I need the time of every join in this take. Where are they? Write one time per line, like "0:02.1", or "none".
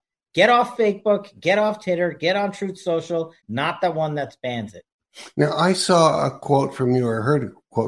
0:03.4